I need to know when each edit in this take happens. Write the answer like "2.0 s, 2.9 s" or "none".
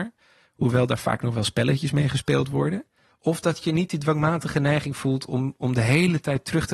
3.1 s